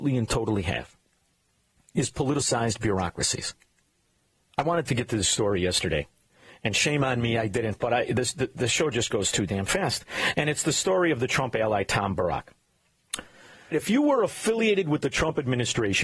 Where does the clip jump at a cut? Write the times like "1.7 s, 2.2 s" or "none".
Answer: 13.7 s